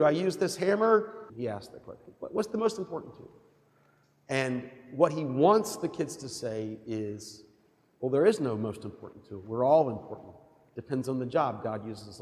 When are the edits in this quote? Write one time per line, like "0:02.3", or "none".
0:01.3